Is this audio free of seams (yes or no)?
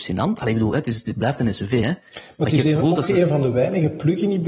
yes